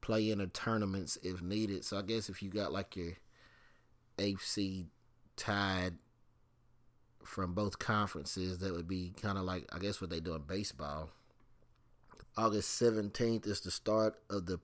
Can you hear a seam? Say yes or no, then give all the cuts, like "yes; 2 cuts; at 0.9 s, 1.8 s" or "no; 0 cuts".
yes; 1 cut; at 12.2 s